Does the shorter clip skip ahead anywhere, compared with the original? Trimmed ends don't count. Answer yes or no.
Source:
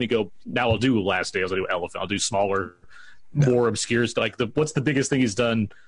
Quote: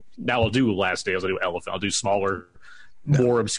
no